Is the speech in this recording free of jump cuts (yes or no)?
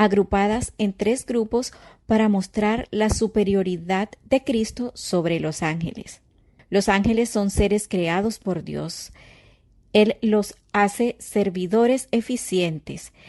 no